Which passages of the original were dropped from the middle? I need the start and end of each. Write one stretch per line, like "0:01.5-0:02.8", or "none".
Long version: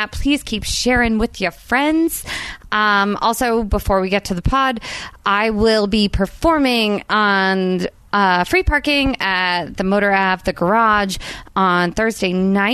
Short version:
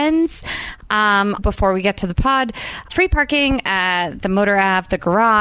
0:03.2-0:03.7
0:05.2-0:08.4

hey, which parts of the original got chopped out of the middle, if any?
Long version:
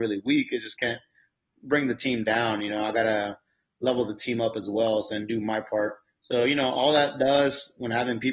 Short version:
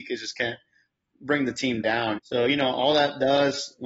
0:02.6-0:06.2

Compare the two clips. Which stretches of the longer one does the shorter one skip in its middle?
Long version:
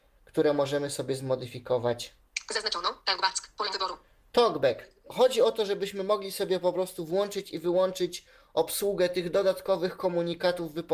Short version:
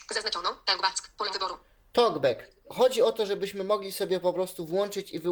none

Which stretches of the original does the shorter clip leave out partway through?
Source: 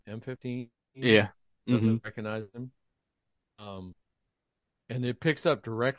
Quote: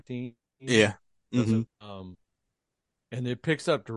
0:02.0-0:03.4

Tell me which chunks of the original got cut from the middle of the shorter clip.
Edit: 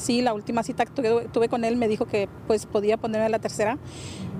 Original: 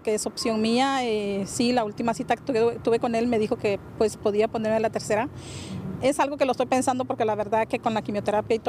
none

